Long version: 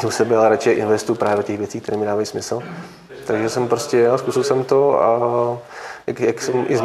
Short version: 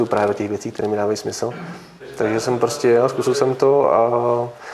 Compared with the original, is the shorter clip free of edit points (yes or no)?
yes